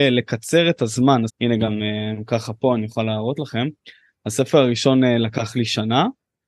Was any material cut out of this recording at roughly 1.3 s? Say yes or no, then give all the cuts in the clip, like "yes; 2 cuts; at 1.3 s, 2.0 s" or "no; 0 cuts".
yes; 1 cut; at 1.3 s